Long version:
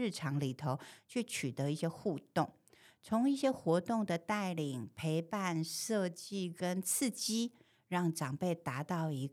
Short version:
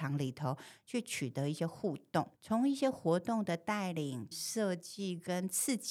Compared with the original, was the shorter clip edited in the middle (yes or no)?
yes